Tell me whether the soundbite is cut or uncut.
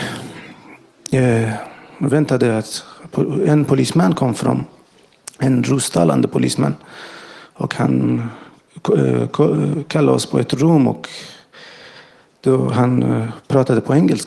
uncut